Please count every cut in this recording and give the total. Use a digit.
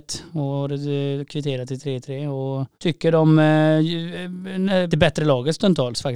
2